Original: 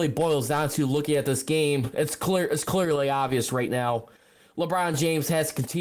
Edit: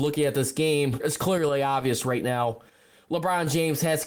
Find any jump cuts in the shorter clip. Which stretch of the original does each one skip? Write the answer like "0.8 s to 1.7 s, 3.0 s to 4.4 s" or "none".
1.9 s to 2.5 s